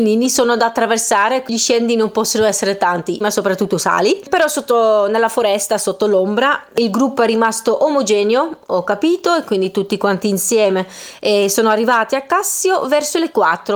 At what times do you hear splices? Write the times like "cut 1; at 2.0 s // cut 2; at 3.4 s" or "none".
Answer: cut 1; at 3.2 s